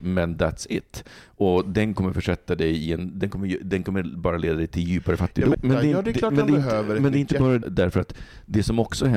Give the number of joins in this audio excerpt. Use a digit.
2